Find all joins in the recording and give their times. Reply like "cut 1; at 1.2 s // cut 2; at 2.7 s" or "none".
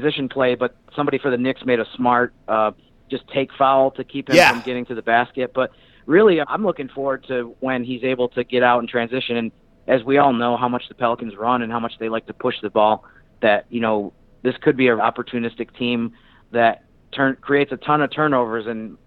cut 1; at 6.4 s // cut 2; at 13.3 s // cut 3; at 15.0 s